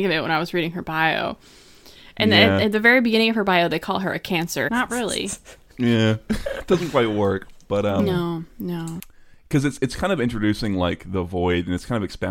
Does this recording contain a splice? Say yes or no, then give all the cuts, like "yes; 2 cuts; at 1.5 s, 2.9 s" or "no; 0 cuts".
yes; 1 cut; at 4.7 s